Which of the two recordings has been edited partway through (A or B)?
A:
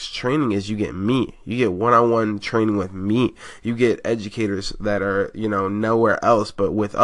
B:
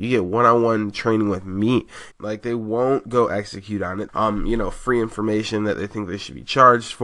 B